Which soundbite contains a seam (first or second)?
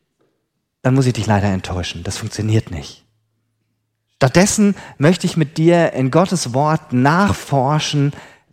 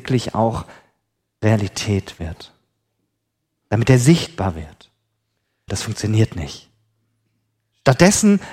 second